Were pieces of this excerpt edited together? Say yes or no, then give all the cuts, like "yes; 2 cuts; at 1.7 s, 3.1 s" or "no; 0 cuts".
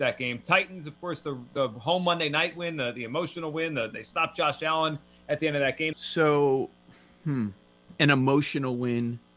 yes; 1 cut; at 5.9 s